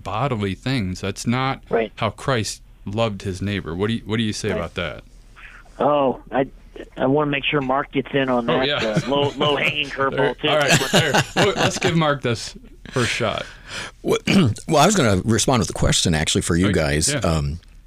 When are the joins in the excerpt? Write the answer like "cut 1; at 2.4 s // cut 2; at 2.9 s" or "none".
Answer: none